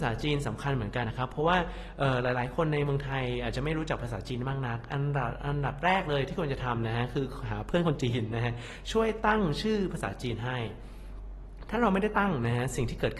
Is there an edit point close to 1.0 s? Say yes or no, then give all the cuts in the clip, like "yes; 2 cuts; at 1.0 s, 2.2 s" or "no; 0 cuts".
yes; 1 cut; at 1.0 s